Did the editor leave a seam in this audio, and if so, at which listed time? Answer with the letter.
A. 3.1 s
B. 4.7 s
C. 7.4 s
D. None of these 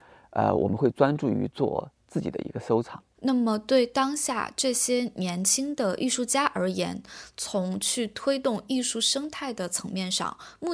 A